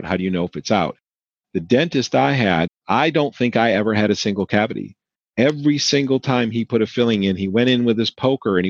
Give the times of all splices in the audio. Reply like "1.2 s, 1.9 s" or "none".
2.7 s